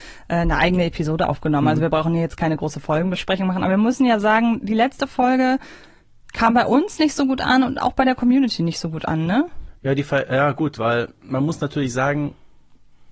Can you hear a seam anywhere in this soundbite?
yes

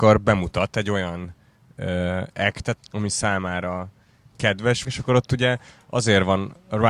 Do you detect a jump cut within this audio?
yes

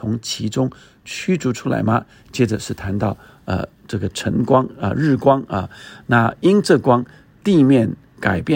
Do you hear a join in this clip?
no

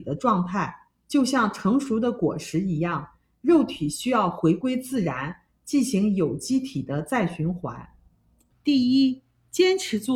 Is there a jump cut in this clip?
yes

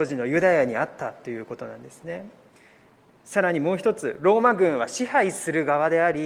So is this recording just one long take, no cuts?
yes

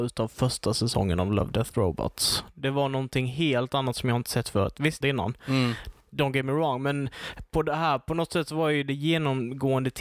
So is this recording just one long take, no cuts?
no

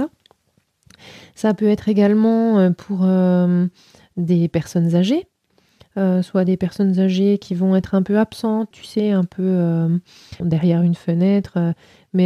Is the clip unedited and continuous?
no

